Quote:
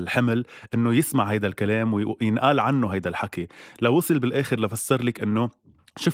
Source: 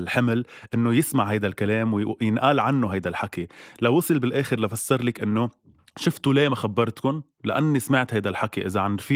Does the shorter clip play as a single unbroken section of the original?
yes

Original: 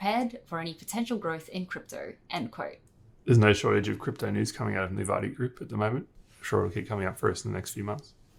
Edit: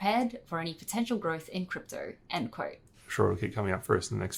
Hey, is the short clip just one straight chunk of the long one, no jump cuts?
no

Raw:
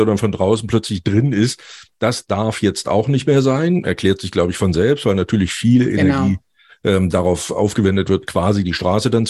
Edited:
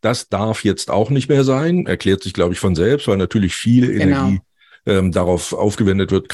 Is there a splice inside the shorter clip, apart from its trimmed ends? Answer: no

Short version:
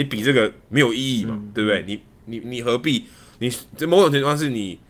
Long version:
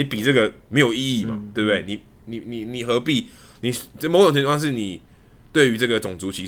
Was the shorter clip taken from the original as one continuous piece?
no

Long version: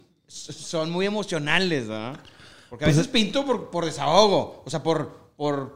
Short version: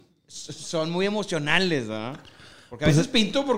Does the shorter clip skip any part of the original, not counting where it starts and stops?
no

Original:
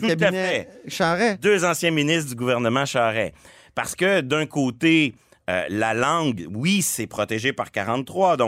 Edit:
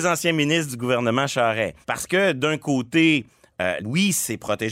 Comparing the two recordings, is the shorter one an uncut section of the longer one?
no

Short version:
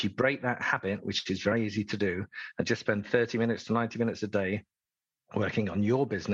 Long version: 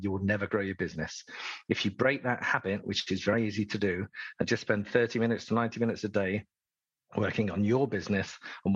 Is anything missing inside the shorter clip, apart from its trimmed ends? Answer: no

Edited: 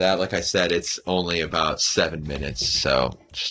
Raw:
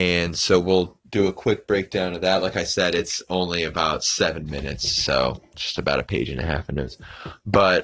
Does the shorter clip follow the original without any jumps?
yes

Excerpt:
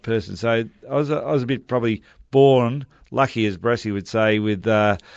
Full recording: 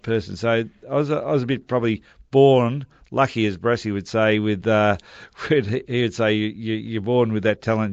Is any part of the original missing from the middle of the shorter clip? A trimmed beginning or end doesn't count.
no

